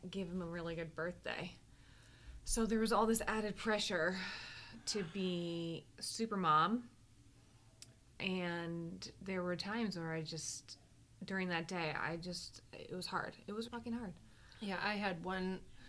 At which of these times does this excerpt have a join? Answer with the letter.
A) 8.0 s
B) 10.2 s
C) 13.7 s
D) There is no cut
C